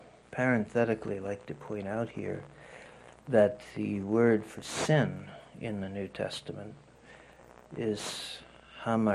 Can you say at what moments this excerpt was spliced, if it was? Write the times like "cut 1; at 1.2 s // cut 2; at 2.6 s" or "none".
none

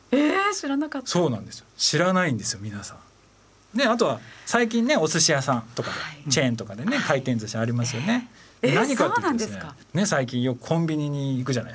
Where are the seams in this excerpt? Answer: cut 1; at 8.5 s // cut 2; at 9.8 s

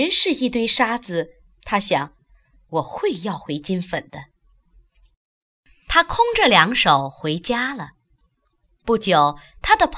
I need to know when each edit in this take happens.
cut 1; at 1.4 s

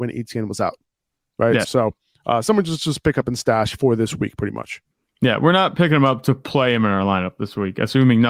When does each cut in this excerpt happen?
cut 1; at 1.6 s

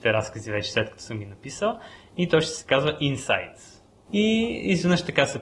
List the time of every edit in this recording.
cut 1; at 4.1 s

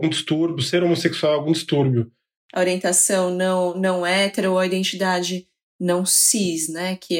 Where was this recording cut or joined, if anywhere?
cut 1; at 2.4 s

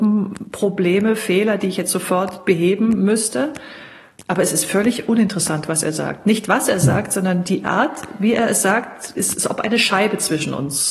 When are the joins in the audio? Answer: none

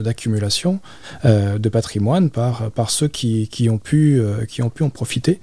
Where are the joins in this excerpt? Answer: none

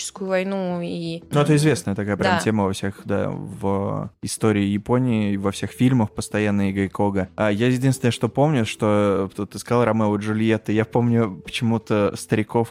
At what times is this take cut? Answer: none

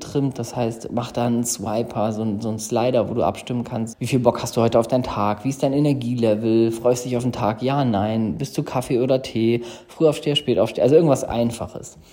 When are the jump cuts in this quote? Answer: cut 1; at 3.9 s

